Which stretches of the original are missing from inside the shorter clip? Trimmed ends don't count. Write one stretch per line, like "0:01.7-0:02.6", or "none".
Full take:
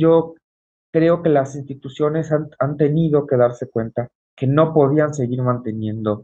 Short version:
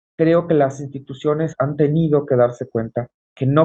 0:02.3-0:02.5